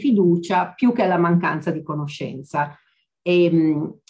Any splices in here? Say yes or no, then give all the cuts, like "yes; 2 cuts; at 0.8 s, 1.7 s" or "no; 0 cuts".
no; 0 cuts